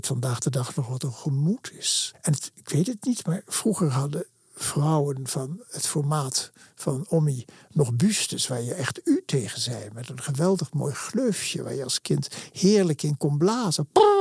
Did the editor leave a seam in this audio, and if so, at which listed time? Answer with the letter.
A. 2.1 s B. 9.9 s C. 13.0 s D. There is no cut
A